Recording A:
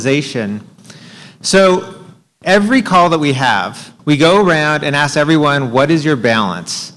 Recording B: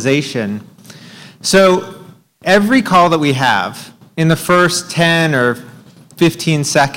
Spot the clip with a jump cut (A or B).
A